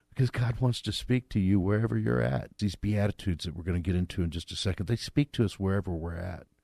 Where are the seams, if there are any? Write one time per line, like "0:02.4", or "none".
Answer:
0:02.6